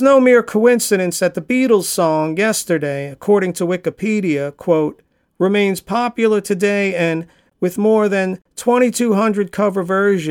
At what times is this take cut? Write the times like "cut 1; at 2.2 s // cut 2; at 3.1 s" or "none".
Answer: none